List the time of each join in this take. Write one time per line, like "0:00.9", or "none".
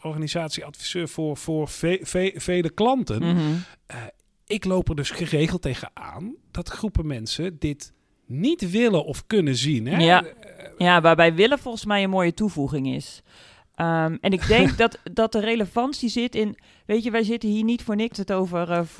none